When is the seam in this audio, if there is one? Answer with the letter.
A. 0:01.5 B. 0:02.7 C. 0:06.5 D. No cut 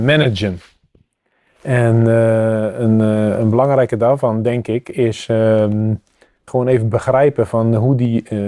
C